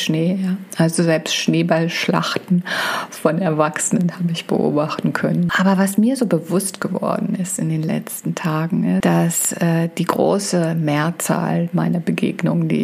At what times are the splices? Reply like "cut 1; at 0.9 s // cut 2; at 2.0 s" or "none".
cut 1; at 5.5 s // cut 2; at 9.0 s